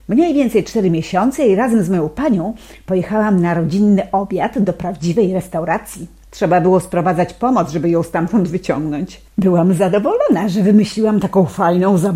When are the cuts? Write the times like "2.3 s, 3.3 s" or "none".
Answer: 6.2 s